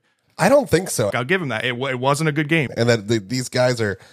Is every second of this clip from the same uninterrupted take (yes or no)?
no